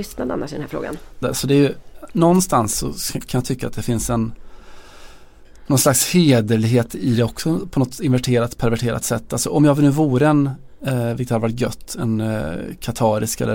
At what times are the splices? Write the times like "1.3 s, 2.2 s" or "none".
1.2 s